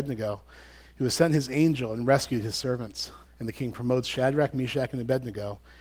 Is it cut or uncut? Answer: cut